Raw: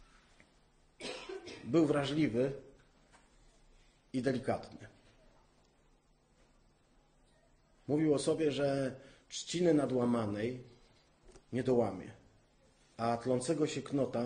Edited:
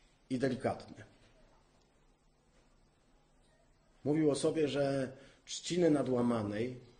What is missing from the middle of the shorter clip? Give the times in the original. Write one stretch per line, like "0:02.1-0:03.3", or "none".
none